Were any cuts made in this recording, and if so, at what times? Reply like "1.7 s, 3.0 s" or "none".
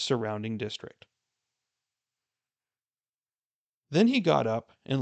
none